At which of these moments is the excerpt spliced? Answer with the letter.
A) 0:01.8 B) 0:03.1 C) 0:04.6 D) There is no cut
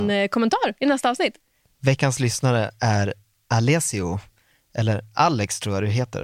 D